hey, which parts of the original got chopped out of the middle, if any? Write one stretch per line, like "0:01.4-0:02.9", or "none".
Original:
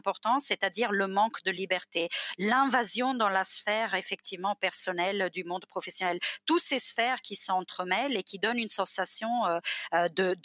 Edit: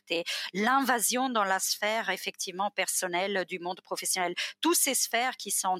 none